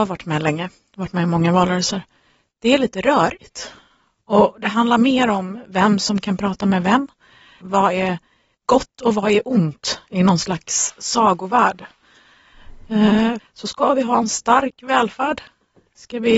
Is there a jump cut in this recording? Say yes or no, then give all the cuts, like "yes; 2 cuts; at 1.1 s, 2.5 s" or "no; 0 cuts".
yes; 2 cuts; at 7.6 s, 13.4 s